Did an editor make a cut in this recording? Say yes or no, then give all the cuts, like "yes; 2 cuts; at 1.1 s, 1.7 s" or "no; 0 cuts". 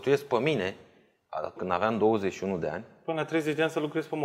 yes; 1 cut; at 1.6 s